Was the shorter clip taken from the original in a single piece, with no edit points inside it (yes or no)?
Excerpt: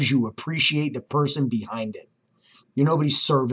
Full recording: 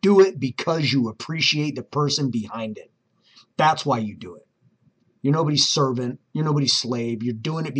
no